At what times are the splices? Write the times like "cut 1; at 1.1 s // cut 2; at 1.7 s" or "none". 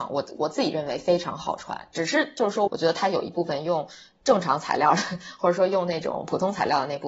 cut 1; at 2.7 s